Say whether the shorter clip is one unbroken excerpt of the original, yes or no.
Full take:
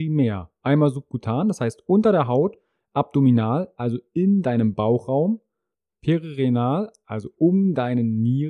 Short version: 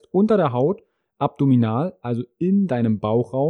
yes